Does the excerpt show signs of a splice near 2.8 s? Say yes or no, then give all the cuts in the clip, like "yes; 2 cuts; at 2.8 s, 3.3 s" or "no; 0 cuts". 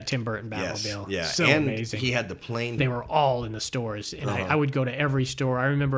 yes; 1 cut; at 2.8 s